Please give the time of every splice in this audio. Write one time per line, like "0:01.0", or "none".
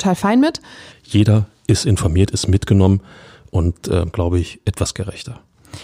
0:00.9
0:04.1